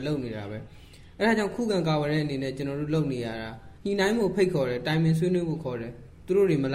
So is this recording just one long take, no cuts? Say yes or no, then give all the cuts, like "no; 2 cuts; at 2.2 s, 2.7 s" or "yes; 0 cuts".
no; 1 cut; at 3.8 s